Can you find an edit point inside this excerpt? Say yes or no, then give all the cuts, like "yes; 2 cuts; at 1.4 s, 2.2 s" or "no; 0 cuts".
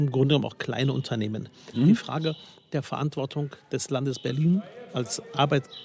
yes; 1 cut; at 1.7 s